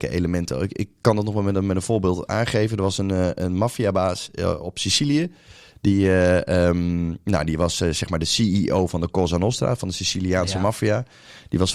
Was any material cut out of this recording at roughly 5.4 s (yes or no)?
no